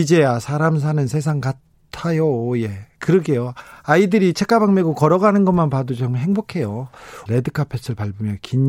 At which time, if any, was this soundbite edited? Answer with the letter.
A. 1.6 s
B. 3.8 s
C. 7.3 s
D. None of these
C